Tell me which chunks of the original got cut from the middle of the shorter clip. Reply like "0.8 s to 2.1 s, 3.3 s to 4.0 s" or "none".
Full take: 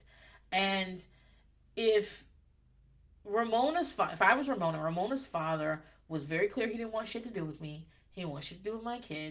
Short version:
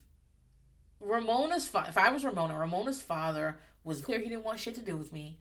6.3 s to 6.5 s